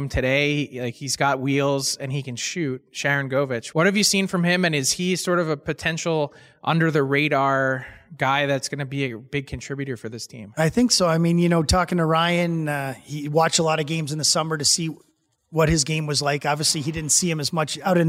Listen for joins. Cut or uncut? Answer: uncut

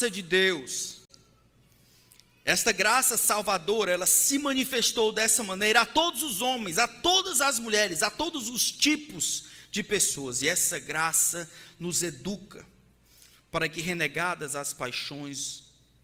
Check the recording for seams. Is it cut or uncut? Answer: uncut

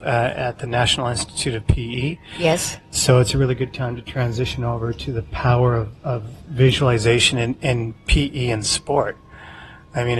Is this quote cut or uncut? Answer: uncut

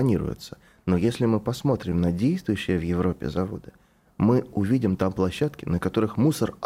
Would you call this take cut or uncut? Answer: uncut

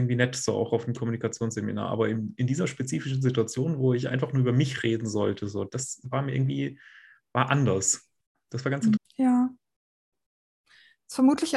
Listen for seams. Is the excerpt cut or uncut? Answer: cut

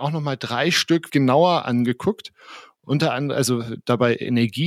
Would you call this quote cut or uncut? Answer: cut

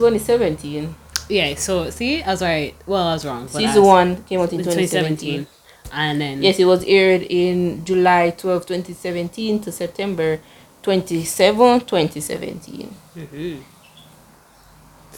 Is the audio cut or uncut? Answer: uncut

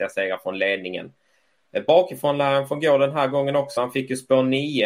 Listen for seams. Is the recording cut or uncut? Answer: uncut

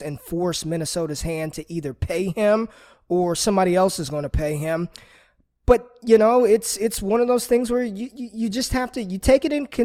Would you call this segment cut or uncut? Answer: uncut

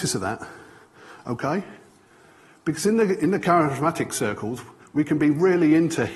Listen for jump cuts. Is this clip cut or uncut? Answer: uncut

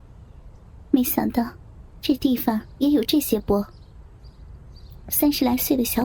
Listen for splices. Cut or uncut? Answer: cut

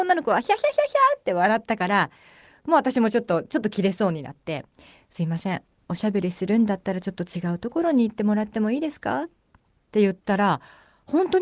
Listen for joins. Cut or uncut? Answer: uncut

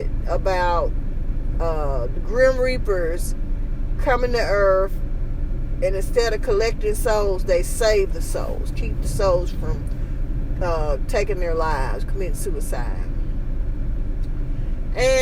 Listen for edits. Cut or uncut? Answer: uncut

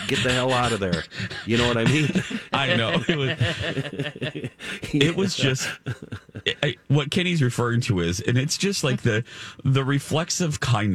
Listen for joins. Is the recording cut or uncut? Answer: uncut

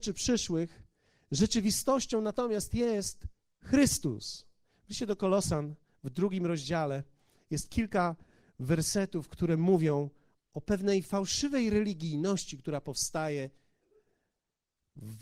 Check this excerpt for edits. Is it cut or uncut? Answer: cut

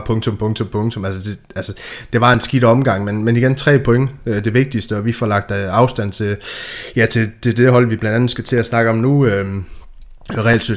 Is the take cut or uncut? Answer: uncut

